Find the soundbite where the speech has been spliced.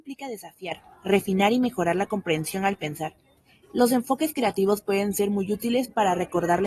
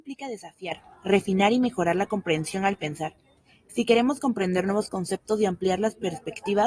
first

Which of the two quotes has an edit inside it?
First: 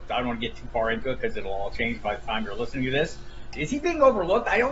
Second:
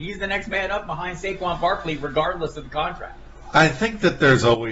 first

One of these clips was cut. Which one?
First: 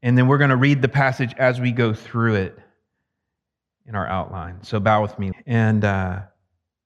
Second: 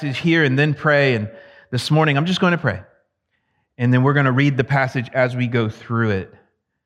first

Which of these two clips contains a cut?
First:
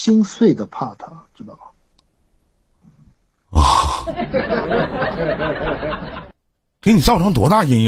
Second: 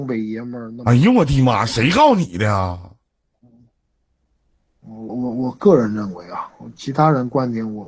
second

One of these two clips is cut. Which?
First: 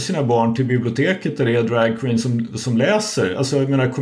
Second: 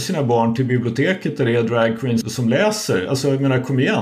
second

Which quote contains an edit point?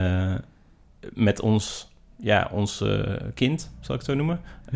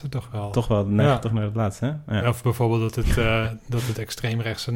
second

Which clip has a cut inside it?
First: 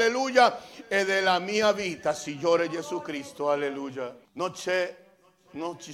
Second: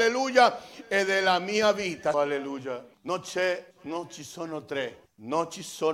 second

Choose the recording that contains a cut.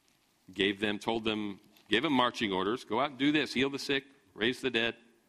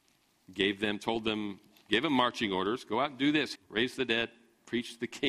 second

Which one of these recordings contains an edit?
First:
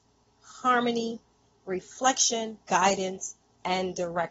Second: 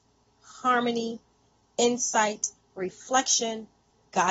first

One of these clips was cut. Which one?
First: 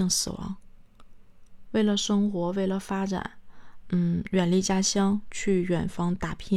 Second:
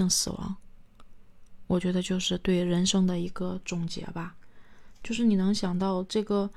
first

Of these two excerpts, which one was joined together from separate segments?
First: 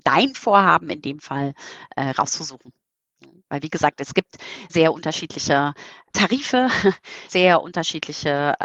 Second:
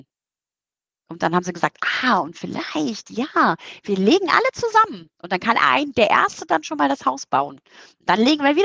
first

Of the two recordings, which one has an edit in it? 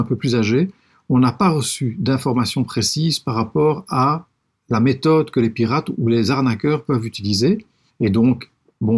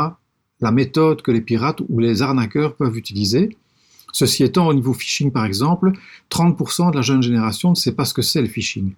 first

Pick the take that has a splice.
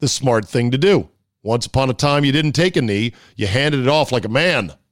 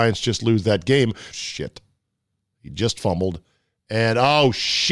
second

